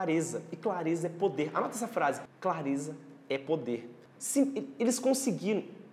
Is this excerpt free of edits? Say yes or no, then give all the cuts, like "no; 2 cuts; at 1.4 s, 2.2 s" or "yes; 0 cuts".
no; 1 cut; at 4.2 s